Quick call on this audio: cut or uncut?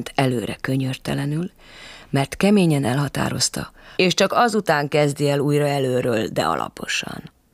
cut